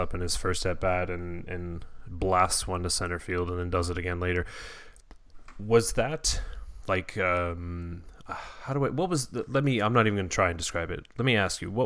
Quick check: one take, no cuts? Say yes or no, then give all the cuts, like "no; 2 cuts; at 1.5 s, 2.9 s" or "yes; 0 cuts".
yes; 0 cuts